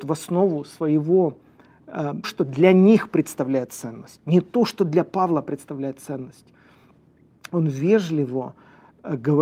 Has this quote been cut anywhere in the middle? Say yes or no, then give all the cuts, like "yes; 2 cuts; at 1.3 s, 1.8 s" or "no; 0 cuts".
yes; 1 cut; at 2.2 s